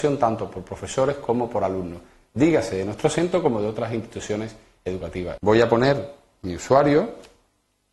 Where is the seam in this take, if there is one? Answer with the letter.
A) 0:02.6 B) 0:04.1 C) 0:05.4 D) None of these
C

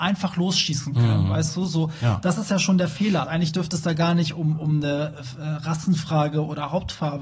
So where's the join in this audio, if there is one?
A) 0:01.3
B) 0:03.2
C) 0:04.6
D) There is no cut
B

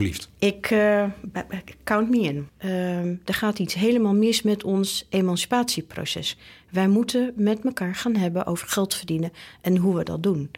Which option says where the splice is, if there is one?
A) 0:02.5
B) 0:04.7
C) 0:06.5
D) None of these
A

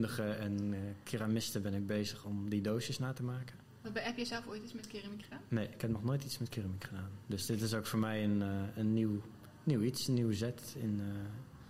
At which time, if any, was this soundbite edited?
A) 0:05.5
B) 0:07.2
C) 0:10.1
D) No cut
D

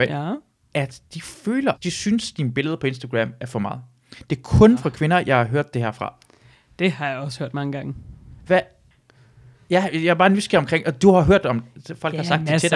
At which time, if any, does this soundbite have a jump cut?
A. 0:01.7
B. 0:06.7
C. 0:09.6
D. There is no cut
A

